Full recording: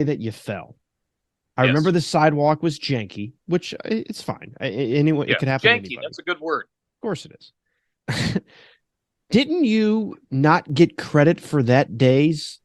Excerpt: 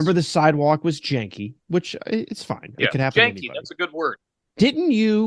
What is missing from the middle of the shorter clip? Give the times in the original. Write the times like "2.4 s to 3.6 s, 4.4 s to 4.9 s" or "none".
4.6 s to 5.3 s, 6.6 s to 8.9 s